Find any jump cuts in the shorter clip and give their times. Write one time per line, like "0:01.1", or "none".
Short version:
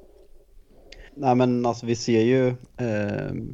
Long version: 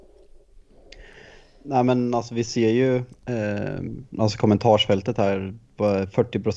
0:01.1